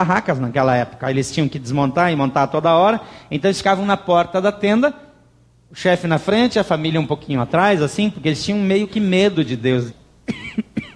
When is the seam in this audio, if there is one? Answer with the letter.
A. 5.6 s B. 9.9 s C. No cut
B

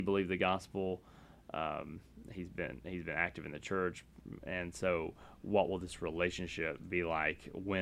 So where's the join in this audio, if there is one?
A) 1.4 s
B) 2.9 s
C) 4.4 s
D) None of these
C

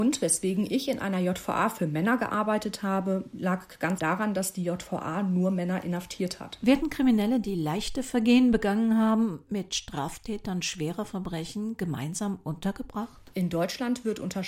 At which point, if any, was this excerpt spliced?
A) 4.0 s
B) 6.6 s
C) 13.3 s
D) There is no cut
A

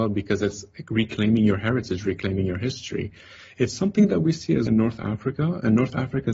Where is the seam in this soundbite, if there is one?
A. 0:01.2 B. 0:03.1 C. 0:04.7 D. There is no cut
C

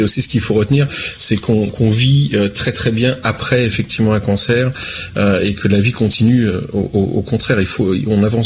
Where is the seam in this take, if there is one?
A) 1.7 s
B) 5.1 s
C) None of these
A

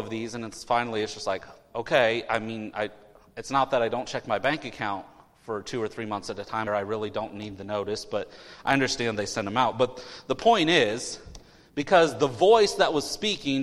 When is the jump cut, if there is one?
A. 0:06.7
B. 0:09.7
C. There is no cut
A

